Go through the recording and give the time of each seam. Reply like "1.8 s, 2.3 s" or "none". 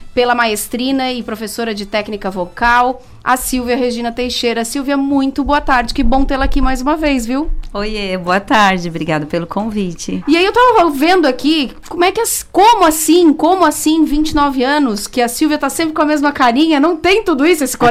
none